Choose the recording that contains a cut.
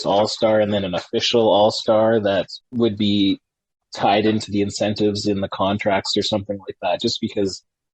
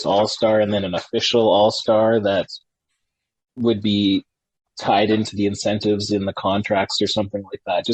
first; 1 cut; at 2.6 s

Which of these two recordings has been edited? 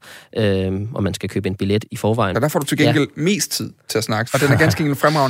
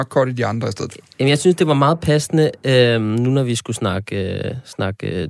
first; 2 cuts; at 2.3 s, 4.3 s

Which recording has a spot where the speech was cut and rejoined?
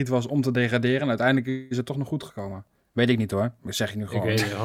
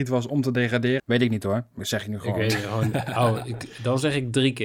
second; 1 cut; at 1.0 s

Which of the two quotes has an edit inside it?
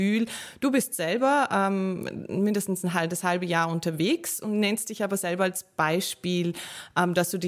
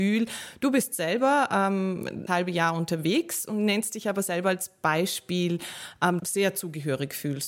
second; 2 cuts; at 2.3 s, 6.2 s

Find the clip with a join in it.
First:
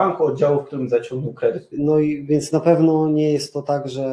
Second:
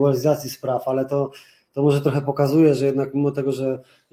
first; 1 cut; at 1.7 s

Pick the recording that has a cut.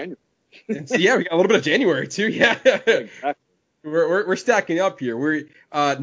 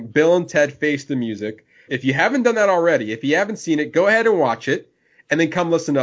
second; 1 cut; at 1.9 s

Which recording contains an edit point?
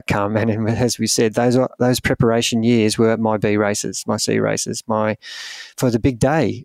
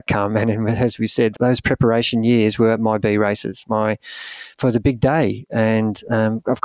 second; 2 cuts; at 1.3 s, 3.6 s

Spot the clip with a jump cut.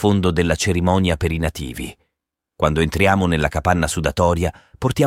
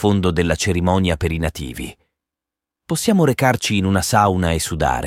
first; 1 cut; at 2.4 s

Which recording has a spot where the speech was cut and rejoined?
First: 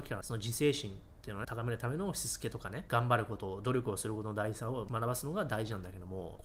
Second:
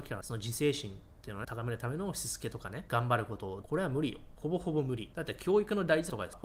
second; 1 cut; at 3.6 s

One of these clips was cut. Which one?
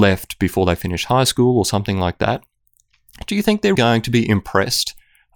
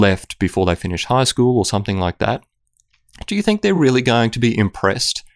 first; 1 cut; at 3.7 s

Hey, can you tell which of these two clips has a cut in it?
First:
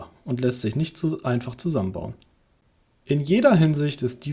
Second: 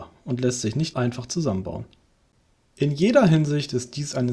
second; 1 cut; at 0.9 s

